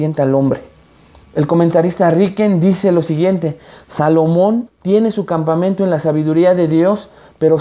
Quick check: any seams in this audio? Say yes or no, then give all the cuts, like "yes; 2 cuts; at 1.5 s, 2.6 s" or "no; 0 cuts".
yes; 2 cuts; at 1.2 s, 4.7 s